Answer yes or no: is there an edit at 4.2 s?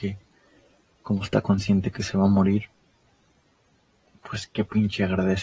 no